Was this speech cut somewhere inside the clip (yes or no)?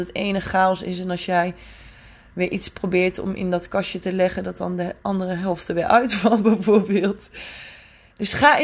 no